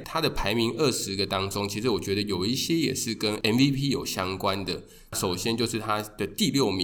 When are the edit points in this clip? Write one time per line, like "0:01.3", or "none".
none